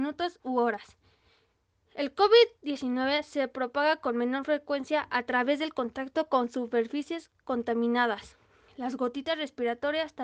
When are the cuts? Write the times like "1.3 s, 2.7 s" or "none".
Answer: none